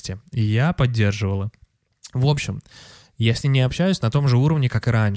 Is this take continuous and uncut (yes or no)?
yes